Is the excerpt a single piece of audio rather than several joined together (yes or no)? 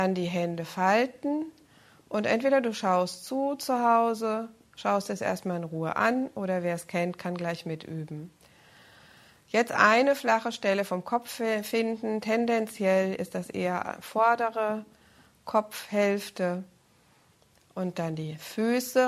yes